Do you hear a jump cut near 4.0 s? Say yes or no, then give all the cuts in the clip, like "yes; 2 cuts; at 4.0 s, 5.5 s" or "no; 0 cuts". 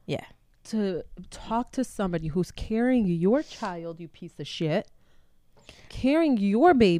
no; 0 cuts